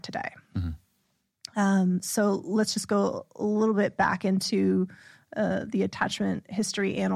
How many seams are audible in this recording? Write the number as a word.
zero